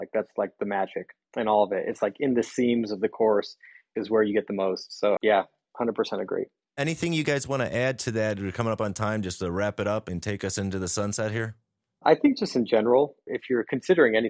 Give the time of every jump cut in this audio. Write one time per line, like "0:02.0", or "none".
0:05.2